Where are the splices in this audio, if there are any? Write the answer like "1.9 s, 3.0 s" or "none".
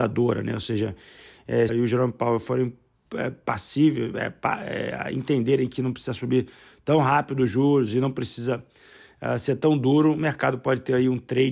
1.7 s